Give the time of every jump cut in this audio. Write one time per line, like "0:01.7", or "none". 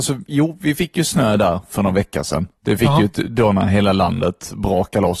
0:02.6